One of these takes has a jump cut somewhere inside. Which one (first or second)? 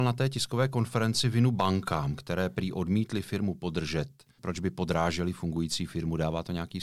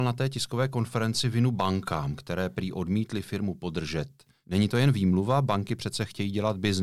first